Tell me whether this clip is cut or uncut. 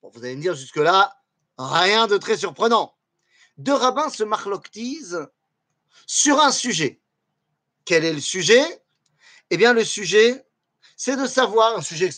uncut